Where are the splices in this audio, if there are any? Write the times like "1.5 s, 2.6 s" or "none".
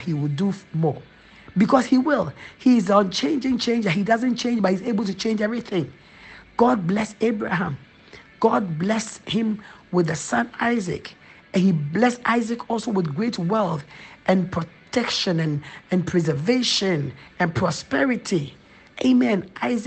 none